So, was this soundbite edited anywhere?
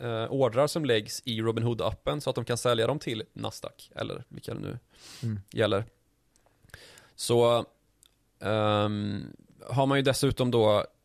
no; 0 cuts

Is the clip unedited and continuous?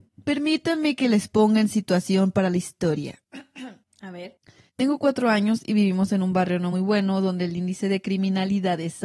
no; 1 cut; at 6.7 s

